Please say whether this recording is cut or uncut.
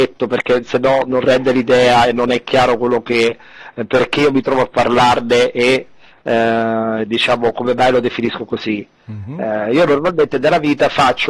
uncut